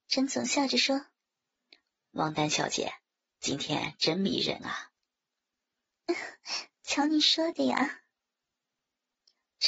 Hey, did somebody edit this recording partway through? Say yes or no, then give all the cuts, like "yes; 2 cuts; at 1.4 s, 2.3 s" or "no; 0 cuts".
no; 0 cuts